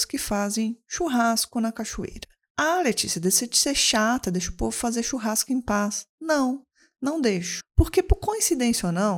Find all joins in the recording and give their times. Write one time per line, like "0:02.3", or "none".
none